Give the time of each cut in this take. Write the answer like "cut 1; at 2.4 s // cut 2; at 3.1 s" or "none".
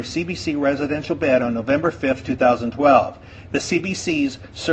cut 1; at 3.5 s